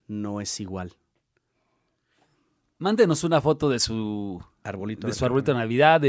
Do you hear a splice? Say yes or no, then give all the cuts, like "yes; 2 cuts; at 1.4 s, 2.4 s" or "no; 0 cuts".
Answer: no; 0 cuts